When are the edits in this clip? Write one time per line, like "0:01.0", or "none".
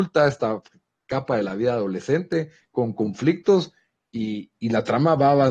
0:04.5